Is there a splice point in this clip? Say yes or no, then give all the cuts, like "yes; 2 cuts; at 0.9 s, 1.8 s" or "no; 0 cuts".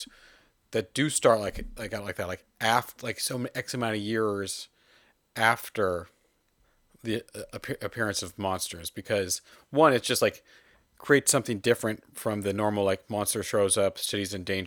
no; 0 cuts